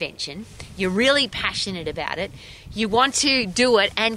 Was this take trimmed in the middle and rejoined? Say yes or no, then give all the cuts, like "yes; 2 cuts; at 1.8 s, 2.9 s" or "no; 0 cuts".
no; 0 cuts